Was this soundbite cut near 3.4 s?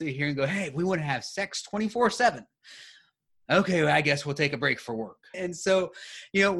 no; 1 cut; at 5.3 s

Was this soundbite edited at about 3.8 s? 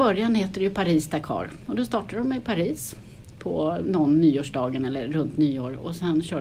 yes; 1 cut; at 3.8 s

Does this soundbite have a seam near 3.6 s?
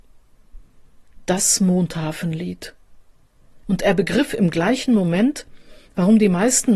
yes; 1 cut; at 3.6 s

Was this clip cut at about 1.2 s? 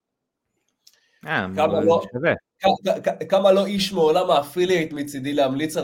no; 1 cut; at 3.3 s

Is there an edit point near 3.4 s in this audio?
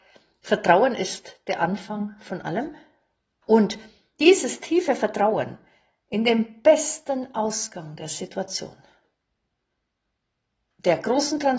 yes; 1 cut; at 3.4 s

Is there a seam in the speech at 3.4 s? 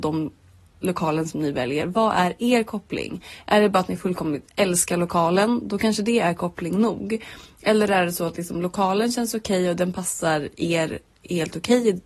no; 1 cut; at 1.8 s

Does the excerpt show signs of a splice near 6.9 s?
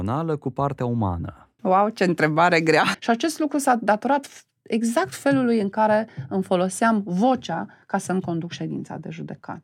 no; 2 cuts; at 1.6 s, 2.9 s

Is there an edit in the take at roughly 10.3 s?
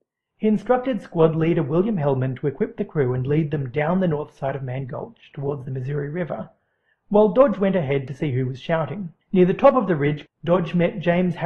yes; 2 cuts; at 9.2 s, 10.3 s

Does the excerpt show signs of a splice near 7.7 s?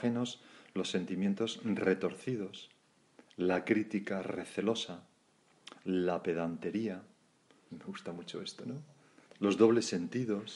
yes; 2 cuts; at 7.7 s, 9.3 s

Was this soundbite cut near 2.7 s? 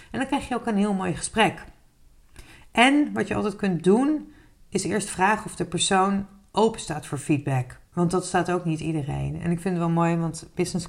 no; 1 cut; at 7.8 s

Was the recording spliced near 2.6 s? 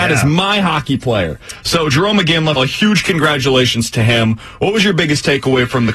yes; 1 cut; at 2.6 s

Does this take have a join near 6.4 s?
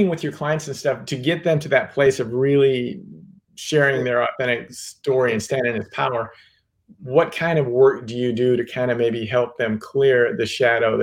no; 0 cuts

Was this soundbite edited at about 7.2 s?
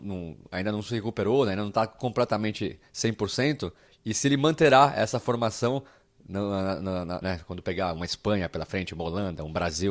yes; 2 cuts; at 3.8 s, 7.2 s

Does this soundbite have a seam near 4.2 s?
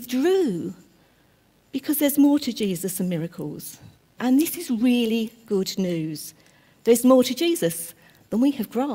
yes; 1 cut; at 4.2 s

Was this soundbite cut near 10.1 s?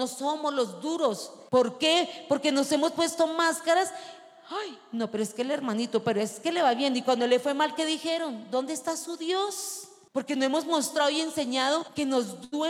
yes; 1 cut; at 10.1 s

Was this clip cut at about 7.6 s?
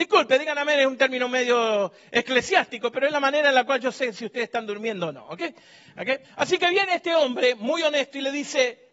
no; 1 cut; at 6.2 s

